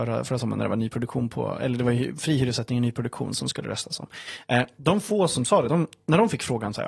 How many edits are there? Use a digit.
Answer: 0